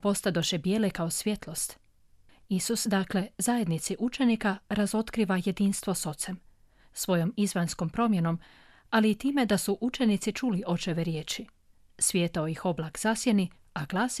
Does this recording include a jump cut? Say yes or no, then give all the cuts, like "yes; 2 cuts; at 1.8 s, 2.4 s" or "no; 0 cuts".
no; 0 cuts